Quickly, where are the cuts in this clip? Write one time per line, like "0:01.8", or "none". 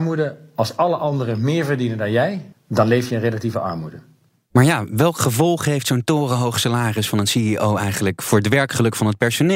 0:02.5